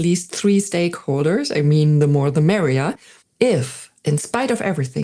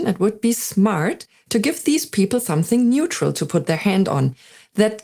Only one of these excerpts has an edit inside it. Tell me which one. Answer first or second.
first